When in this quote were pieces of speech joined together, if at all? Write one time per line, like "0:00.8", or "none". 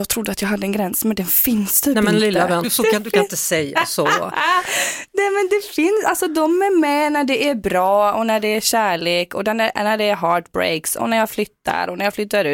0:02.6